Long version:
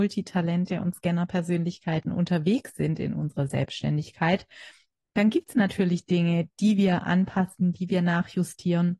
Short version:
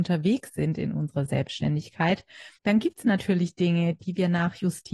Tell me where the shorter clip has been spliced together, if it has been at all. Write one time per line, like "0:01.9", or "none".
0:02.6
0:04.0